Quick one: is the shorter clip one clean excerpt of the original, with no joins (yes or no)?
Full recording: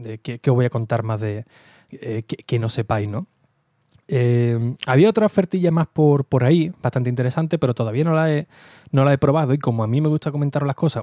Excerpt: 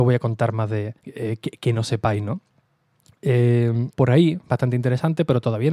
no